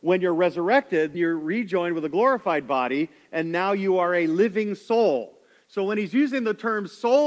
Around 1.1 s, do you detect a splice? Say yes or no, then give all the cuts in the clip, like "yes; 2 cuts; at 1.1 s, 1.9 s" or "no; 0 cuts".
yes; 1 cut; at 1.1 s